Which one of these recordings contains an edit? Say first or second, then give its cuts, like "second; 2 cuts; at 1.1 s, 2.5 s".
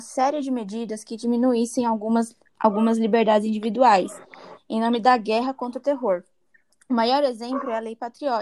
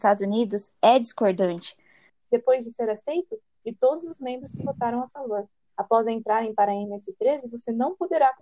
second; 2 cuts; at 2.1 s, 3.6 s